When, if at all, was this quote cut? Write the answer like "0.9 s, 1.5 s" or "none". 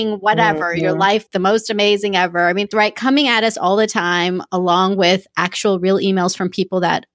1.3 s, 2.7 s

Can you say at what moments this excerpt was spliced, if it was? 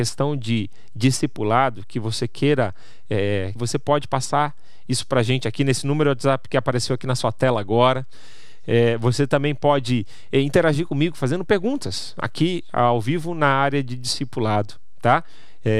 3.6 s

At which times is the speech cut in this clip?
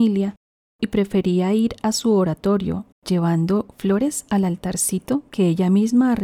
2.9 s

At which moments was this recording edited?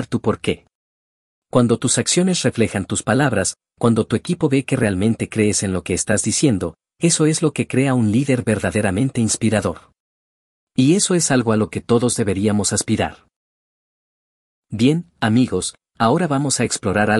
none

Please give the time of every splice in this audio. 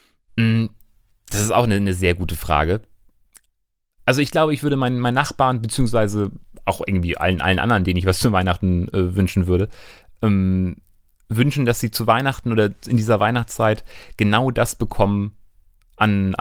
none

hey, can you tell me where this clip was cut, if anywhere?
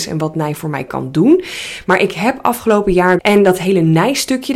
1.8 s, 3.2 s

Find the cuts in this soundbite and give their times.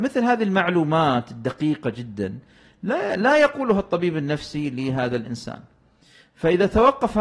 none

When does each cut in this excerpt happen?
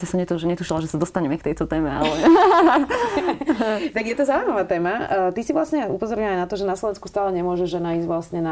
none

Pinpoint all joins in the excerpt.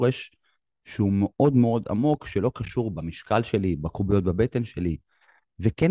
none

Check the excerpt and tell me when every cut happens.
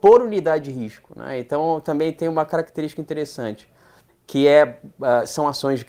4.1 s

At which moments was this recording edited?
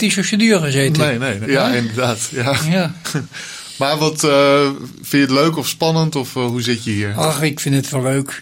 1.4 s

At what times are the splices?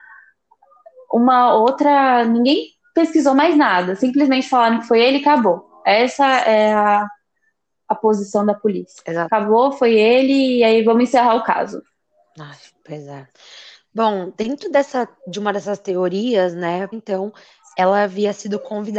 16.9 s

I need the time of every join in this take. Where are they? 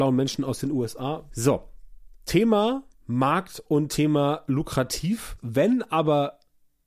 1.3 s, 5.4 s

